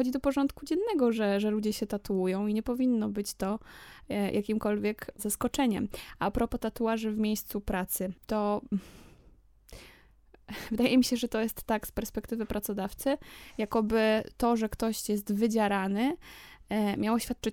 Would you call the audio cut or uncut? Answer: cut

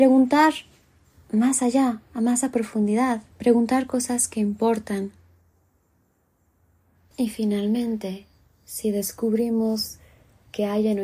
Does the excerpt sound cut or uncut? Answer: cut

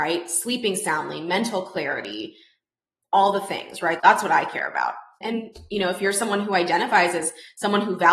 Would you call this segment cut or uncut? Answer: cut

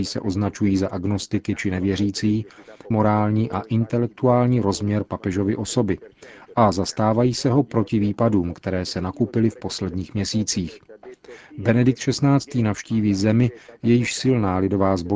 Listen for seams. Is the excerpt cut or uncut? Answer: cut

